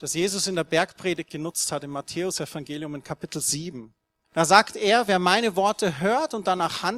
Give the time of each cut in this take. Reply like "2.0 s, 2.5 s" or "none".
4.2 s